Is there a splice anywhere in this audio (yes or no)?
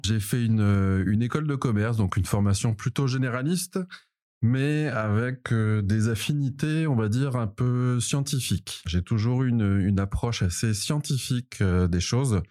no